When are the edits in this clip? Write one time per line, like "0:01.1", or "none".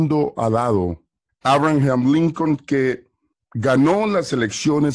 0:01.3